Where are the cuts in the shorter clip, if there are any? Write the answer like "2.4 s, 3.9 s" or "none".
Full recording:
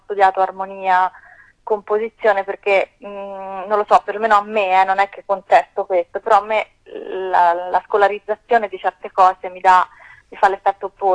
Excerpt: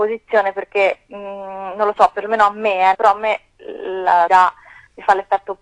2.9 s, 4.3 s

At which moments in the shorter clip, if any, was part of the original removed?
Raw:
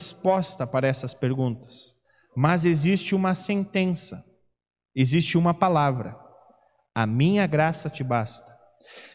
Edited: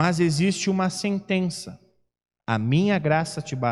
2.4 s

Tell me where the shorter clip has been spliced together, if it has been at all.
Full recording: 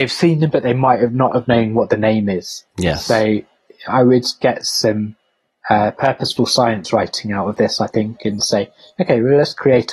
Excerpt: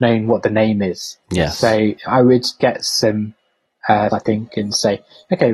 2.0 s, 4.1 s

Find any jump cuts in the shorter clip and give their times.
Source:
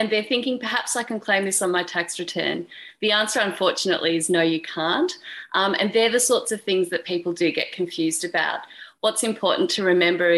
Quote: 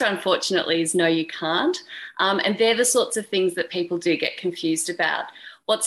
none

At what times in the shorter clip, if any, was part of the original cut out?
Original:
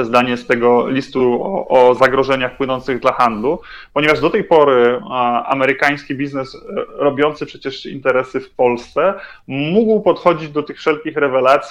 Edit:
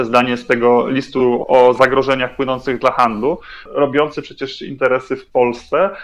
1.4 s, 3.7 s

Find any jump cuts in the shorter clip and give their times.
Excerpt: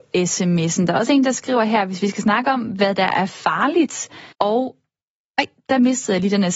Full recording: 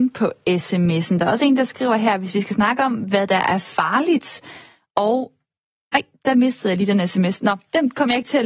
4.3 s

